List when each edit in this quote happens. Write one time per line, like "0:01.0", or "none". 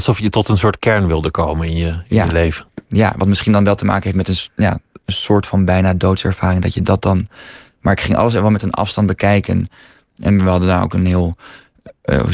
none